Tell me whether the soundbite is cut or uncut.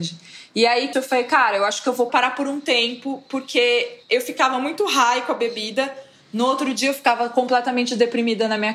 cut